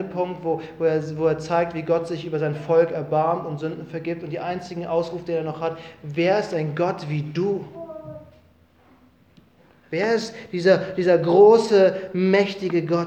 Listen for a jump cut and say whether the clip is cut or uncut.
uncut